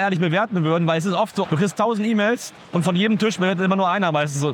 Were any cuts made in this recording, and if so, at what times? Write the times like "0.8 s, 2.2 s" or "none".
1.4 s